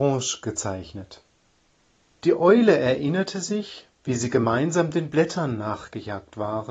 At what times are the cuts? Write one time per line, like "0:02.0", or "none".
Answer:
0:02.2
0:03.9